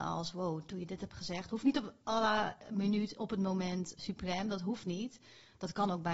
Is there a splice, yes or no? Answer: yes